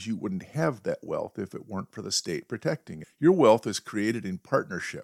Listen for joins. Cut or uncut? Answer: uncut